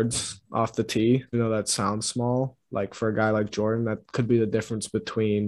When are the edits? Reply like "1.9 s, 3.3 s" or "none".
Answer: 1.3 s

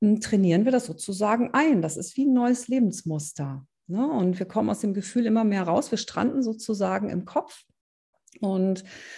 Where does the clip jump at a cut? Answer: none

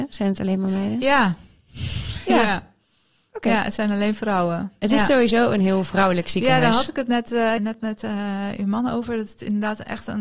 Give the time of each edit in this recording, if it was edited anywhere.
7.6 s

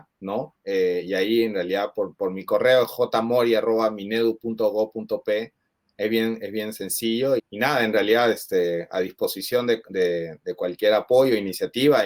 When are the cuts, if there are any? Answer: 7.4 s

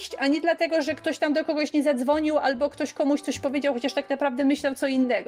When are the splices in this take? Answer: none

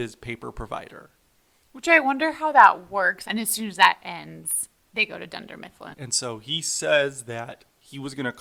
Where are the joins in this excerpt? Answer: 3.2 s, 5.9 s

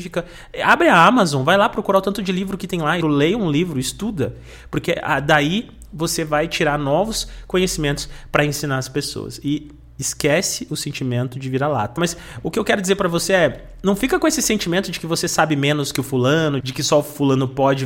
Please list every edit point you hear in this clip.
3.0 s, 12.0 s, 16.6 s

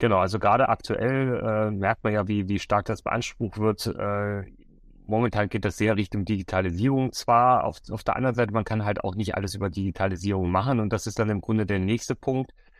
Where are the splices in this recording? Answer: none

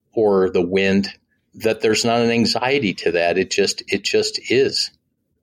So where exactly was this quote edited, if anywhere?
none

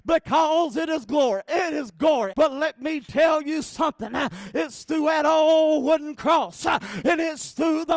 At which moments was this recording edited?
2.3 s

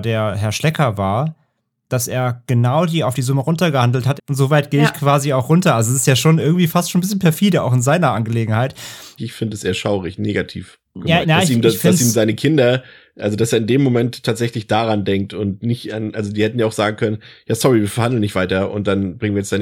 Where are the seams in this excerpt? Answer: 4.2 s, 9.2 s, 11.2 s

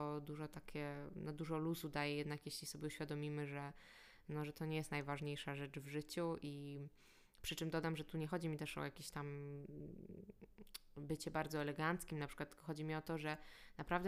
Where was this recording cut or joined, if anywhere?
none

